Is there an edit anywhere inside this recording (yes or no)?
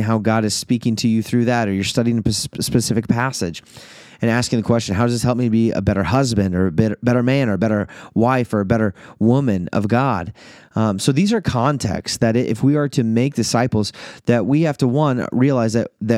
no